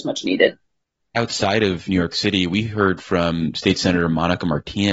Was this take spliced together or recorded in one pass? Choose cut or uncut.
uncut